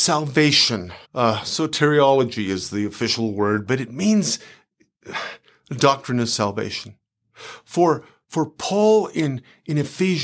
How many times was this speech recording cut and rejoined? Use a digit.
1